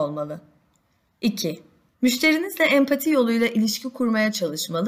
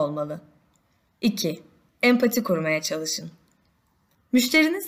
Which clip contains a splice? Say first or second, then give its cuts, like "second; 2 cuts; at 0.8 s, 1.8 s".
first; 1 cut; at 1.9 s